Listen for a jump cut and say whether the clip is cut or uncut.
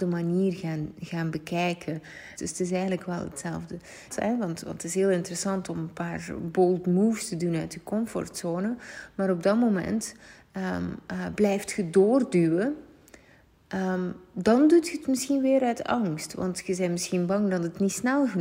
cut